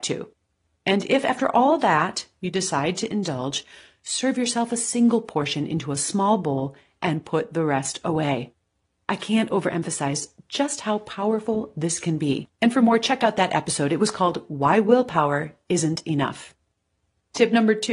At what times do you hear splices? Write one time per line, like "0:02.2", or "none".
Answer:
none